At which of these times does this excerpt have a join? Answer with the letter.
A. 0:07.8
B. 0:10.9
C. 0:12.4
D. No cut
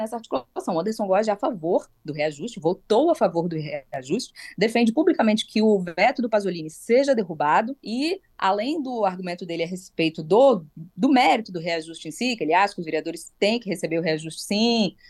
A